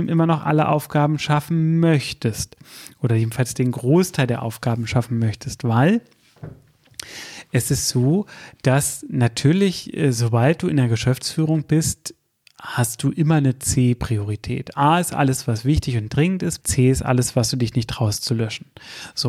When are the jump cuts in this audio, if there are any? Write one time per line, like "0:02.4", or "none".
0:16.6